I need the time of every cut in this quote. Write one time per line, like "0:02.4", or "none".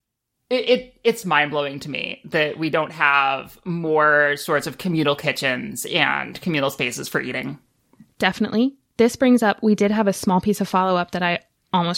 0:01.2